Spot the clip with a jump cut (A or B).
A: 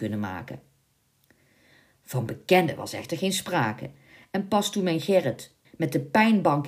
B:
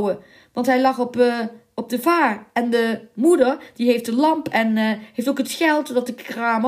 A